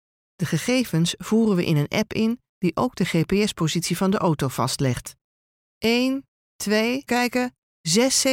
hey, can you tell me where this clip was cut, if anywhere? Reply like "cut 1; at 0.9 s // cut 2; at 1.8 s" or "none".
cut 1; at 7.1 s